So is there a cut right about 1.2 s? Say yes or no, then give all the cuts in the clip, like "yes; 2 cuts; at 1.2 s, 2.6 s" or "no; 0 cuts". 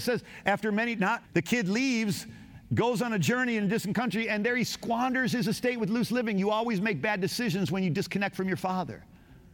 yes; 1 cut; at 1.2 s